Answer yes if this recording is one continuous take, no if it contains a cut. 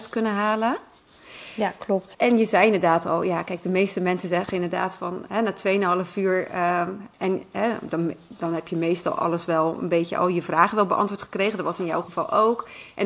no